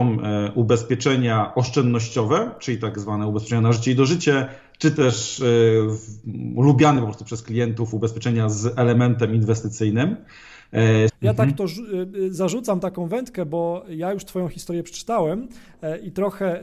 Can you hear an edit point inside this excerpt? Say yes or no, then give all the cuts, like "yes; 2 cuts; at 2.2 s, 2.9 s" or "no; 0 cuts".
yes; 1 cut; at 11.1 s